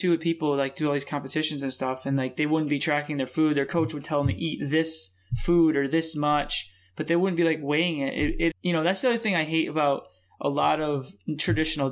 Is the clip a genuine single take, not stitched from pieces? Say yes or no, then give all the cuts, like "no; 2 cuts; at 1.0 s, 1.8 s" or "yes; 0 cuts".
no; 1 cut; at 8.5 s